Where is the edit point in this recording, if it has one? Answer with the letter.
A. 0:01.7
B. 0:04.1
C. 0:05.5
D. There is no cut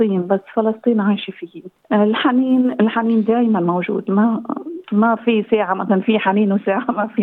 D